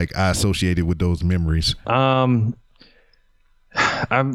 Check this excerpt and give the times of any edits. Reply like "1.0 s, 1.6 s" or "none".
1.8 s